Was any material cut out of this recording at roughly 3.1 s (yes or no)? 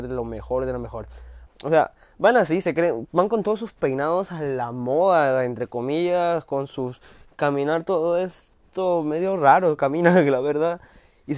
no